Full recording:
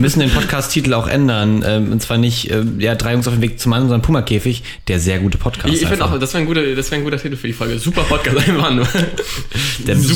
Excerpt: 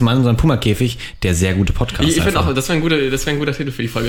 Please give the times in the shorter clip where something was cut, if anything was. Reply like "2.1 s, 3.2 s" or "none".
none

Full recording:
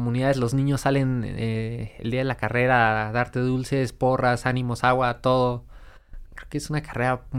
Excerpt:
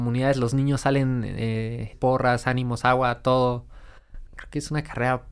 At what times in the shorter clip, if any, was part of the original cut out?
1.9 s

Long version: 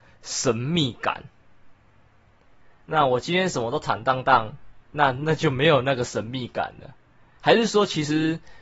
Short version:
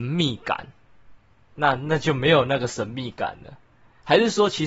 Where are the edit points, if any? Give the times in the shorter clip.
1.5 s

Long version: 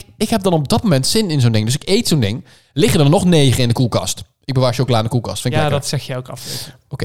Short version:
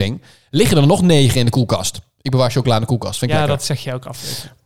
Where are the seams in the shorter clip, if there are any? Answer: none

